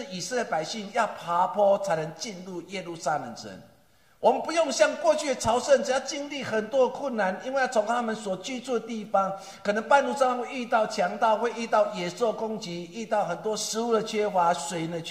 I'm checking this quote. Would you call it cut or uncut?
uncut